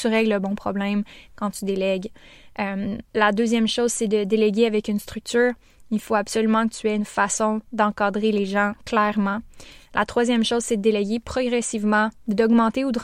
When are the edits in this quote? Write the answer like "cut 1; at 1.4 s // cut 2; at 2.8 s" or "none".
cut 1; at 3.1 s